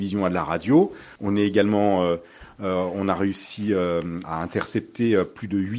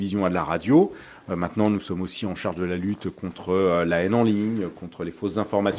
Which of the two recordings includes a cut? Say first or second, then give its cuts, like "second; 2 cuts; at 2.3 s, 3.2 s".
first; 2 cuts; at 1.2 s, 4.2 s